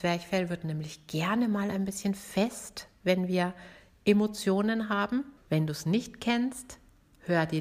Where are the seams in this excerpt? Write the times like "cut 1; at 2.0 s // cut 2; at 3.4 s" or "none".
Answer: cut 1; at 5.4 s